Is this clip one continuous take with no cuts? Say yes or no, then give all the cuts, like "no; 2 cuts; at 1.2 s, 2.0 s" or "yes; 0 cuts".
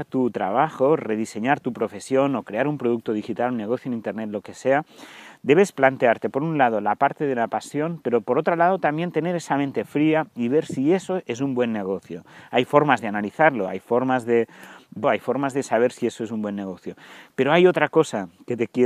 no; 2 cuts; at 15.0 s, 17.3 s